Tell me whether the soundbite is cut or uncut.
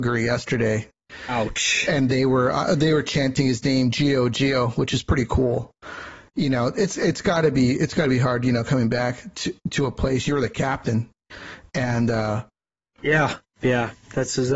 uncut